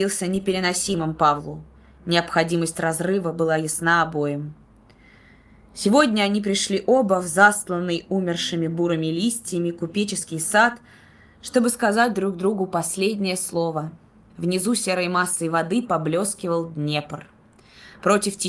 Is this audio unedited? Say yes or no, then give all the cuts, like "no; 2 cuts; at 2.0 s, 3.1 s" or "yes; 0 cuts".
no; 1 cut; at 14.3 s